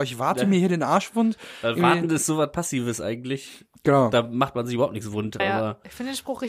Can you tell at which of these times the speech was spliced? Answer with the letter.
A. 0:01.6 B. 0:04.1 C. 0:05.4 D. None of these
C